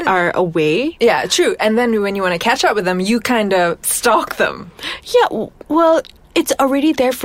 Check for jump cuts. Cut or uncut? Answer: uncut